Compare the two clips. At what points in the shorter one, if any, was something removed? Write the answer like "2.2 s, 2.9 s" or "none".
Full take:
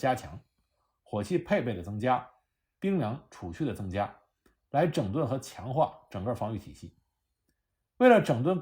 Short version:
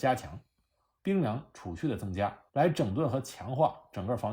1.0 s, 2.5 s